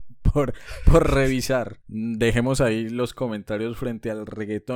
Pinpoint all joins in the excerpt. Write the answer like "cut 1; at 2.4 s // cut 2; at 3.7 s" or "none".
cut 1; at 1.8 s